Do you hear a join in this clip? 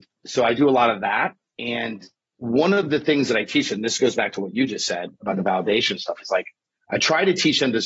no; 0 cuts

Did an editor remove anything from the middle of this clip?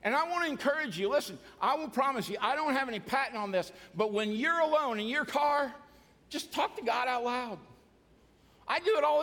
no; 0 cuts

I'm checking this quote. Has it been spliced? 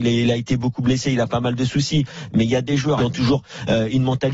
yes; 1 cut; at 3.0 s

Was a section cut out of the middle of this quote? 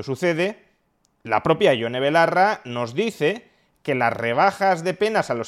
no; 0 cuts

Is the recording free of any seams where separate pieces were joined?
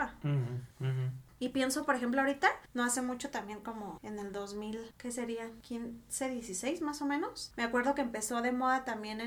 yes; 0 cuts

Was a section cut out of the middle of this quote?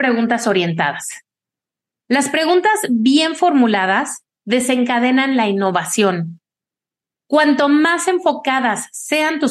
no; 0 cuts

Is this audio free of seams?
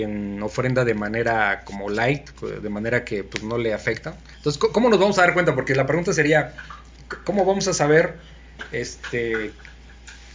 yes; 0 cuts

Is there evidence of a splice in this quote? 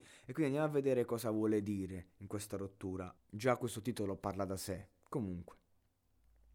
yes; 1 cut; at 3.2 s

